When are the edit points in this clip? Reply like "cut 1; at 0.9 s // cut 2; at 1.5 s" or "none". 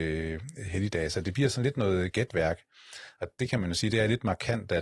none